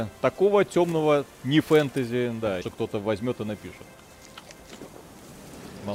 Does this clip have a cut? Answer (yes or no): yes